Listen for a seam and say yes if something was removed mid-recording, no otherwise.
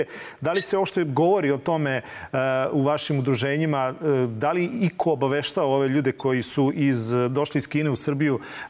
no